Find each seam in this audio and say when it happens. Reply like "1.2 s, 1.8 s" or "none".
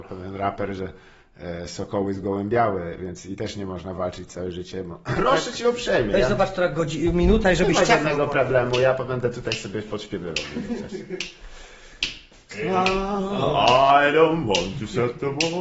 5.2 s